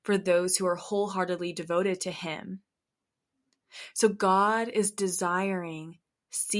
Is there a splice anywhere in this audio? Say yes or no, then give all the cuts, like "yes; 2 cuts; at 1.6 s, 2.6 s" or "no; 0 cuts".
no; 0 cuts